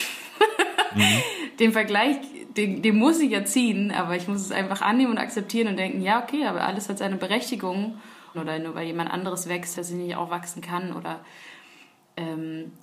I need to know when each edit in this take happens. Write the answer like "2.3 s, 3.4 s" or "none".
8.3 s, 9.7 s

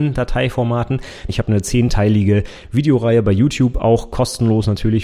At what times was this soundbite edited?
1.3 s

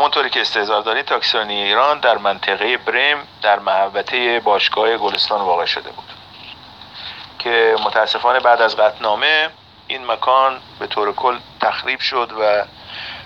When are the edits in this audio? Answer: none

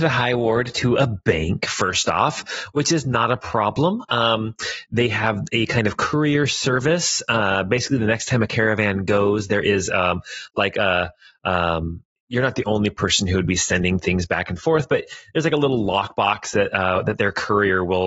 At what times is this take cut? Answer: 12.2 s

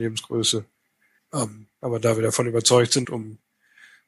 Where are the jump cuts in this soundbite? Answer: 1.2 s, 3.0 s

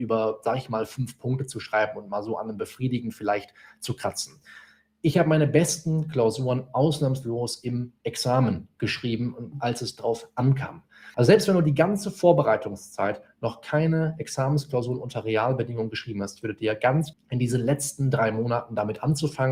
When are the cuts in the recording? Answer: 9.5 s, 11.1 s, 17.1 s

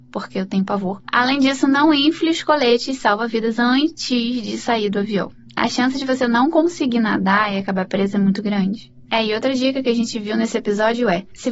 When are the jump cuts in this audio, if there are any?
9.1 s

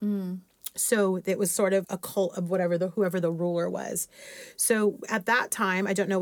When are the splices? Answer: 1.8 s

